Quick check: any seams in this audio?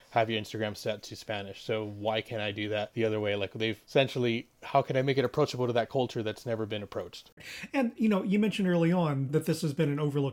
no; 0 cuts

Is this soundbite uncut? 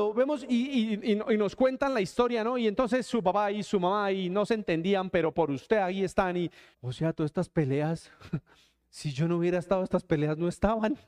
no; 1 cut; at 6.7 s

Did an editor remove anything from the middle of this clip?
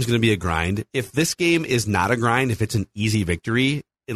no; 0 cuts

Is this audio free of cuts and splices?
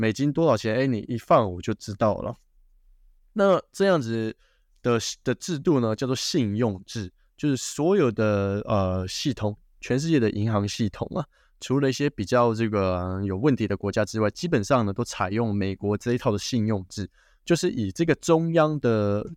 yes; 0 cuts

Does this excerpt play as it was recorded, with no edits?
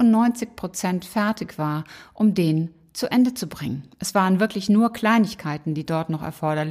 yes; 0 cuts

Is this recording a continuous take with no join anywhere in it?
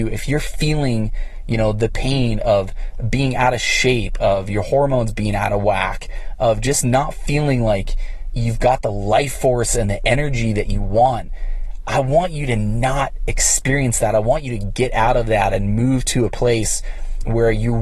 yes; 0 cuts

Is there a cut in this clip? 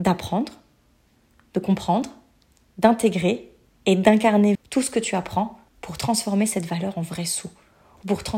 yes; 2 cuts; at 4.5 s, 5.7 s

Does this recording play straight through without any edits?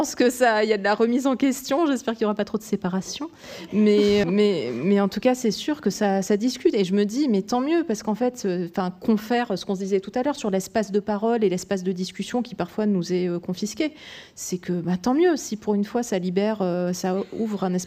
no; 1 cut; at 4.2 s

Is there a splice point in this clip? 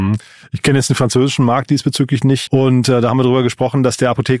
yes; 1 cut; at 2.5 s

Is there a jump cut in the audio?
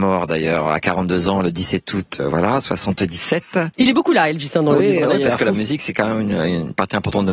no; 0 cuts

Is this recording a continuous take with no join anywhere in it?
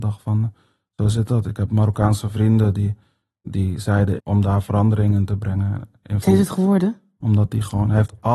no; 2 cuts; at 4.2 s, 7.2 s

